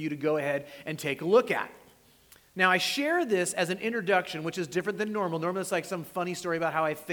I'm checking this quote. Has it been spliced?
no; 0 cuts

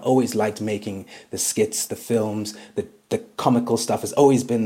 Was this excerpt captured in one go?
yes; 0 cuts

